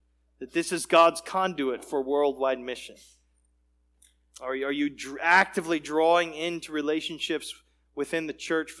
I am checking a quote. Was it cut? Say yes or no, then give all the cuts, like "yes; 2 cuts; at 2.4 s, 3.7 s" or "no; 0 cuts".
no; 0 cuts